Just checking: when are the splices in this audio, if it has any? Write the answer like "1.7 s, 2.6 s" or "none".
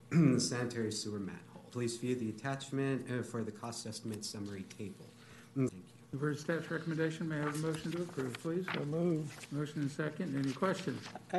1.7 s, 5.7 s, 9.5 s